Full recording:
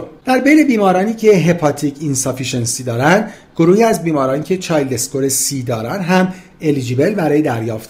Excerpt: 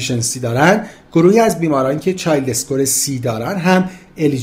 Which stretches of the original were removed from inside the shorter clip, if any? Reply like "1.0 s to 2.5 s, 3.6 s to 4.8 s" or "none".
none